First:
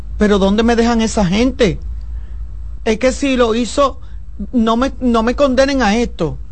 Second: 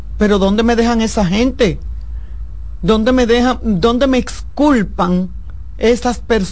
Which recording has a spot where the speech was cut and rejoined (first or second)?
first